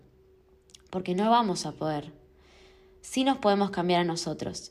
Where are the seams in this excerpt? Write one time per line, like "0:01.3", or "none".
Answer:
none

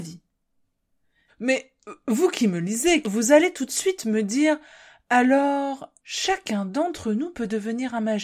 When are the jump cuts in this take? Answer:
0:01.3
0:03.0
0:06.0

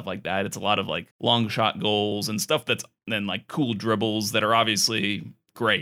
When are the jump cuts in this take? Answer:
0:01.1

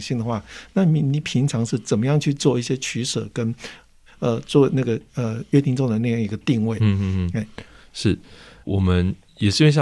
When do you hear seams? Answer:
0:01.2
0:08.6

